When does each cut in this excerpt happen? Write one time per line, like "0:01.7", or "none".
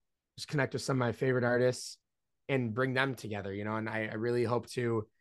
none